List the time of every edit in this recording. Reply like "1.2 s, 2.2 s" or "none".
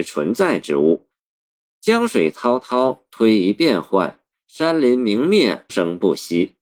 5.7 s